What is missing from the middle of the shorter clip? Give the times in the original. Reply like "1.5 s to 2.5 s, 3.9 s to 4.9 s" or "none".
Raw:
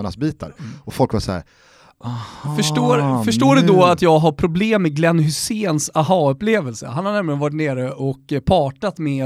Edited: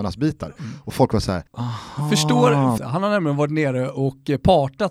1.5 s to 1.9 s, 3.2 s to 6.8 s

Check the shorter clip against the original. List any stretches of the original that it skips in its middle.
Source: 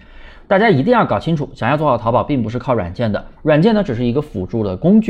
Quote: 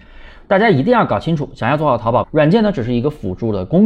2.2 s to 3.4 s

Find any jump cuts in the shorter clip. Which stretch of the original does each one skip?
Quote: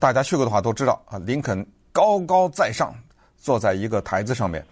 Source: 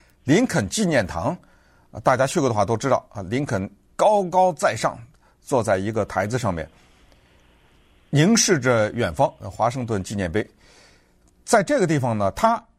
none

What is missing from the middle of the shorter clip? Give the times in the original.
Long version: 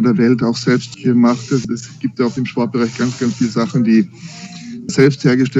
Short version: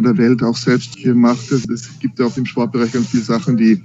2.9 s to 3.2 s

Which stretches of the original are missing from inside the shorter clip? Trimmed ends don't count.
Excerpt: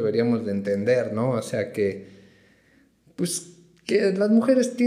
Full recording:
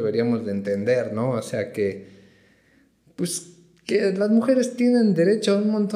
none

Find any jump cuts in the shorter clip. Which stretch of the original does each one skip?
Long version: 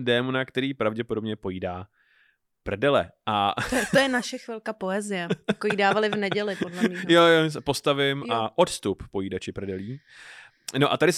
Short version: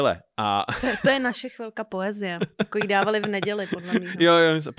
none

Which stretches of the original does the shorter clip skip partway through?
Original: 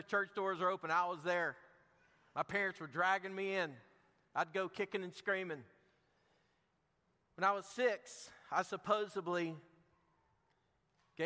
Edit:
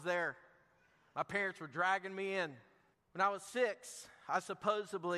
4.1 s to 7.2 s

